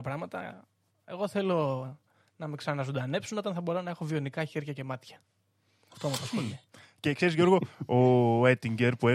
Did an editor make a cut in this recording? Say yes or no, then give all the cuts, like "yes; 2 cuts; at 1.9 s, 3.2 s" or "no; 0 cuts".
no; 0 cuts